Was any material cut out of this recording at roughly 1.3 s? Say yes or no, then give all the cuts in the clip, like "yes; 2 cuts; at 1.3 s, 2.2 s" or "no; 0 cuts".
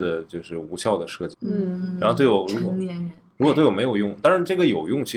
yes; 1 cut; at 1.3 s